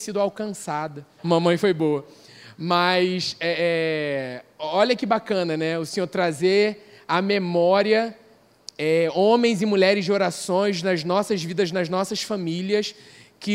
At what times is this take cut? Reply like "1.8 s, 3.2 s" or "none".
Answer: 1.2 s